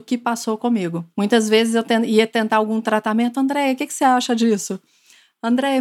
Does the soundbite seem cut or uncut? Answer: uncut